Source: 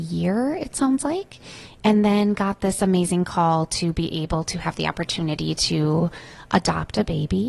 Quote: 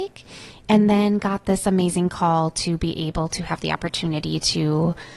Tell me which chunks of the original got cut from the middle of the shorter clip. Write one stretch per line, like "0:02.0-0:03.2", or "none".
none